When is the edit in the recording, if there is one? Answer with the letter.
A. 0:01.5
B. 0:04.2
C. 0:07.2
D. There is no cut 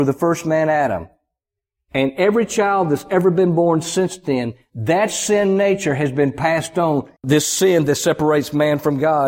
C